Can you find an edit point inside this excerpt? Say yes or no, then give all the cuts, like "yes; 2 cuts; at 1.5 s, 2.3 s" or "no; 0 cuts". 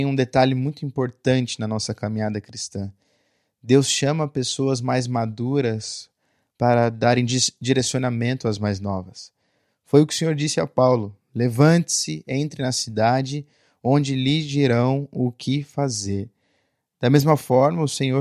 no; 0 cuts